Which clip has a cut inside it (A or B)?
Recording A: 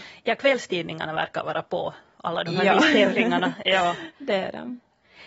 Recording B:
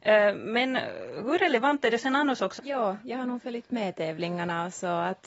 B